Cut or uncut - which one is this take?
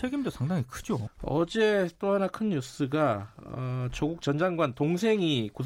cut